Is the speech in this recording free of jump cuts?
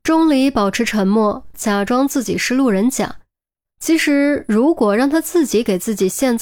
no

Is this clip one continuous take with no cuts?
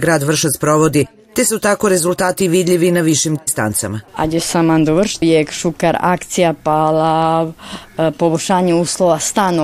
no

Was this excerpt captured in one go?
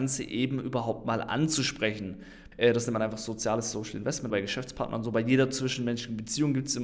no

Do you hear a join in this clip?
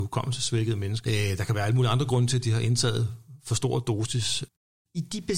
yes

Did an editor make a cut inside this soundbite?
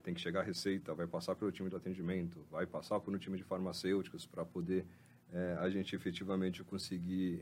no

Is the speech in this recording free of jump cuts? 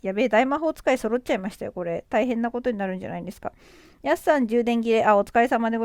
yes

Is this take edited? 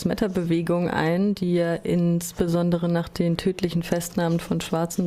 no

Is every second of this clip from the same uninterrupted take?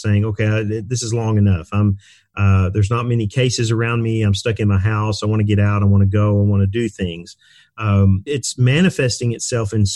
no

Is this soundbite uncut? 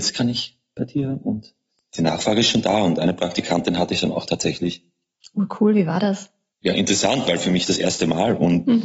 yes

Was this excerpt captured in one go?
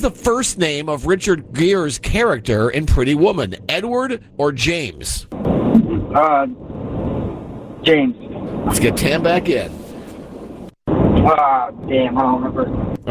no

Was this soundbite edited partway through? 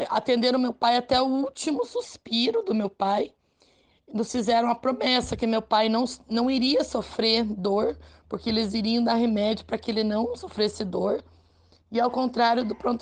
no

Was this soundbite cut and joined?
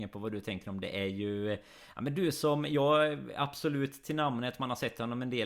no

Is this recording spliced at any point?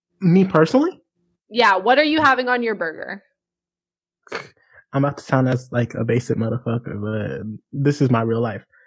no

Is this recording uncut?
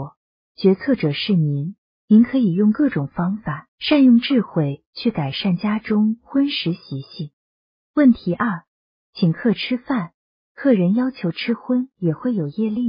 yes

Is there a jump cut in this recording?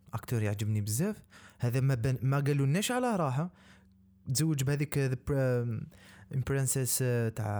no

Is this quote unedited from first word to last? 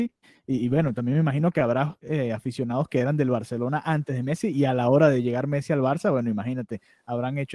yes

